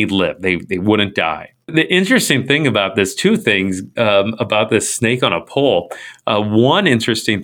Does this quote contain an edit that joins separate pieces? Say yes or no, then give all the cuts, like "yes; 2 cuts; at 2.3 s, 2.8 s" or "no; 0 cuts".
yes; 1 cut; at 4.0 s